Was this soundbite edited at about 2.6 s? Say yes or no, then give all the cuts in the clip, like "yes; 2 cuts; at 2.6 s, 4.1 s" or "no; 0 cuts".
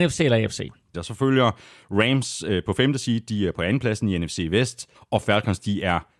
no; 2 cuts; at 0.9 s, 4.9 s